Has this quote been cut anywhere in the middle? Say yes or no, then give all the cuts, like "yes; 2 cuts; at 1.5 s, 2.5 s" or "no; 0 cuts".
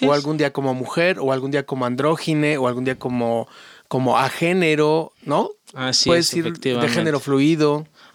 no; 0 cuts